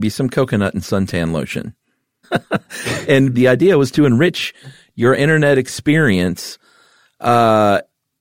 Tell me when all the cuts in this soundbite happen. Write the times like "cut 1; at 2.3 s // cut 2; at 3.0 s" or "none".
cut 1; at 2.2 s // cut 2; at 3.3 s